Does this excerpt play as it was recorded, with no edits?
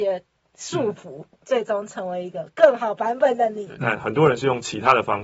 no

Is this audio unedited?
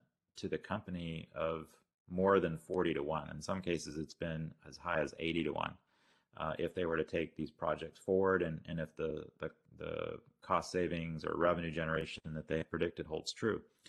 yes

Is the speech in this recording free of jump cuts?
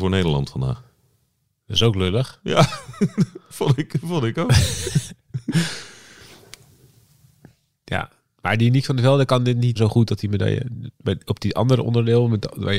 no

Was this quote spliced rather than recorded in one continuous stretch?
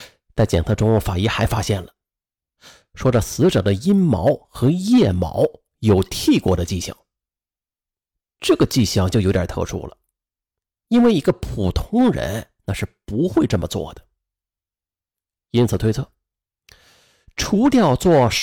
no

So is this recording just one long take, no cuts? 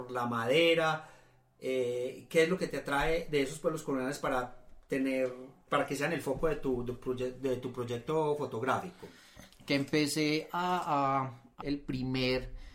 no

